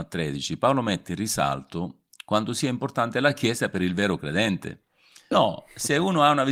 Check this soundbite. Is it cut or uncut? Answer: cut